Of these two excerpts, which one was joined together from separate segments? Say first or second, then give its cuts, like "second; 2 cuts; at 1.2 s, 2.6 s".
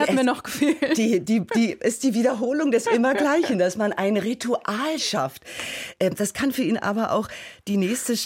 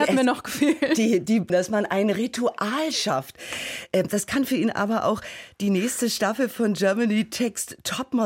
second; 1 cut; at 1.5 s